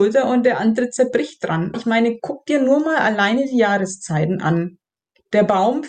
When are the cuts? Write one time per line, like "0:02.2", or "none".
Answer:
0:01.7